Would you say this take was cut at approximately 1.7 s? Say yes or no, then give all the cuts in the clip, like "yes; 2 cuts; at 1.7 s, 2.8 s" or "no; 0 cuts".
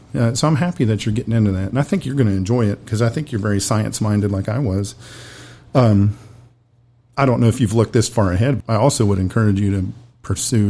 no; 1 cut; at 8.6 s